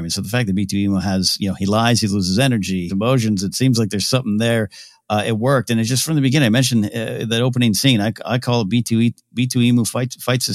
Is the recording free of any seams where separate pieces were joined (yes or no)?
no